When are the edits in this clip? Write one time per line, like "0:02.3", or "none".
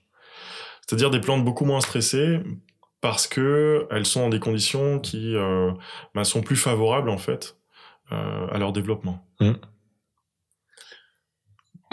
none